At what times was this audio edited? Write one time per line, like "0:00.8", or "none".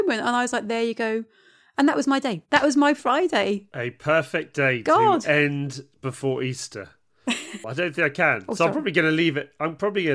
0:07.6